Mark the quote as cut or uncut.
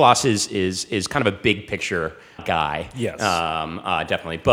cut